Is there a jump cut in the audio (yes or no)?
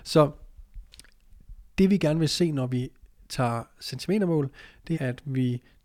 yes